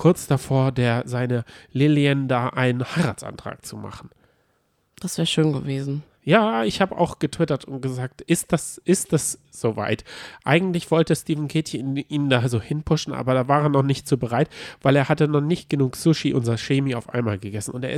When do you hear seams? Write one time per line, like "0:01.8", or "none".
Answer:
none